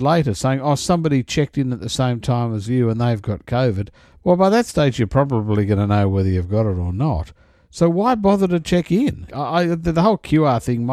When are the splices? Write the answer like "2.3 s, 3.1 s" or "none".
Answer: 4.2 s, 9.3 s